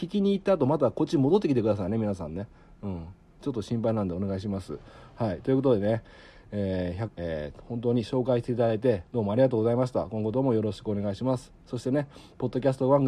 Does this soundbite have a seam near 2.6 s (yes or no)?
no